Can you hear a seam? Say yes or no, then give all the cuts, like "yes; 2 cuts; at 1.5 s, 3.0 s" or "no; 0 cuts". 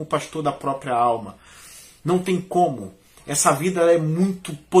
no; 0 cuts